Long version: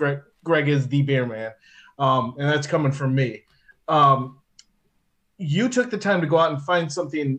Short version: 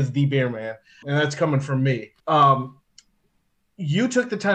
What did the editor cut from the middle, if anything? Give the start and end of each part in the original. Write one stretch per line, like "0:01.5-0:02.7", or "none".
0:01.8-0:02.3
0:03.5-0:03.8